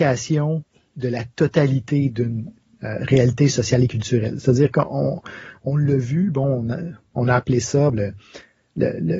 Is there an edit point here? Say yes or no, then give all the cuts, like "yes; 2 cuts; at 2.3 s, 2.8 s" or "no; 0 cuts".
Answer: yes; 1 cut; at 7.9 s